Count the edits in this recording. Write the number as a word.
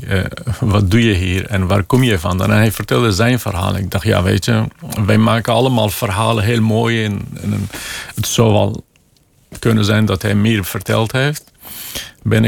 zero